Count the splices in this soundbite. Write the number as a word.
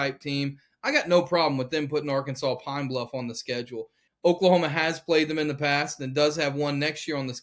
one